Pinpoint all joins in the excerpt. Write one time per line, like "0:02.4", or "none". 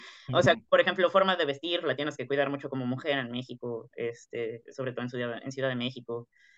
none